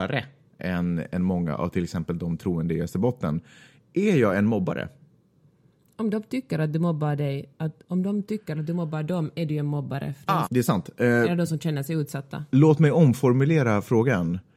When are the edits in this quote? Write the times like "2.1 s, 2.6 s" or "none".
10.4 s